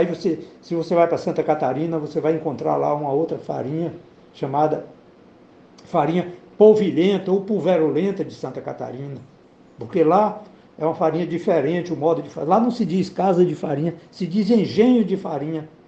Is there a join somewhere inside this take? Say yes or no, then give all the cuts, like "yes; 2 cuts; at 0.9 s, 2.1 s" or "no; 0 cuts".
no; 0 cuts